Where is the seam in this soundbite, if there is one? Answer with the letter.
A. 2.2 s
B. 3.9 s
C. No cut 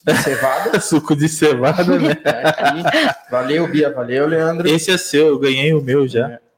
C